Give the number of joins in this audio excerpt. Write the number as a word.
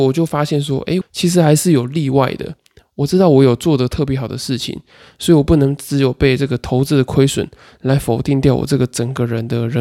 one